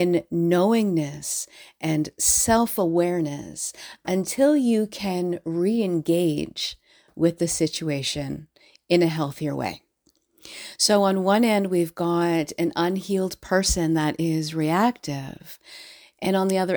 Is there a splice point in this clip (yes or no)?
no